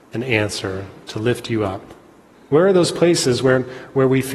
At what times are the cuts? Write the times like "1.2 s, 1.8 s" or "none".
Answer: 2.3 s